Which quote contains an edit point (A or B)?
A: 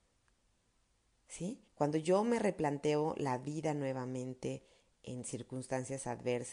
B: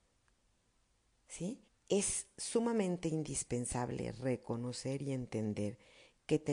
B